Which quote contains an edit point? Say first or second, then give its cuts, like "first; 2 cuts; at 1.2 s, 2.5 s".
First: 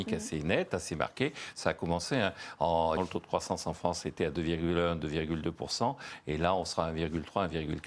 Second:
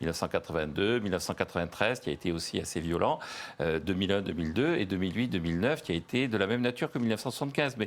first; 1 cut; at 3.0 s